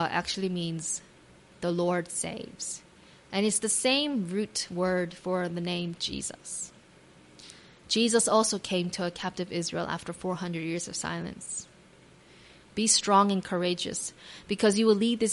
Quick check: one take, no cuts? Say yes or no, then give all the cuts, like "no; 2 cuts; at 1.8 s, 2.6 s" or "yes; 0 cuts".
no; 1 cut; at 12.6 s